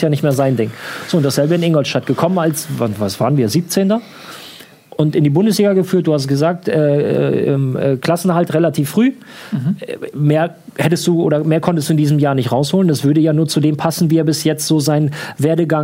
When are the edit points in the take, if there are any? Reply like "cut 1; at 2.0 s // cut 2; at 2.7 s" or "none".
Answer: none